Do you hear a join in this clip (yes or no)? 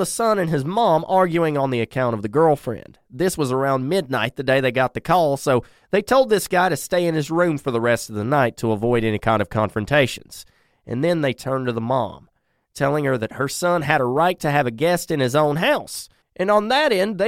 no